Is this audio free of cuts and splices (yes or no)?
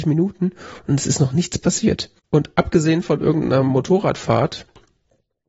no